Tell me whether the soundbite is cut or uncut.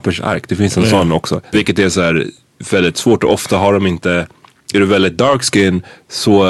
cut